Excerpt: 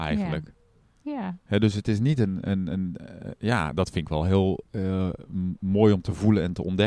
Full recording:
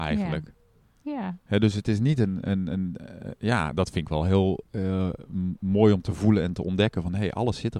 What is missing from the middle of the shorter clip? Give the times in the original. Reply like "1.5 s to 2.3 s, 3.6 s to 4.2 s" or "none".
none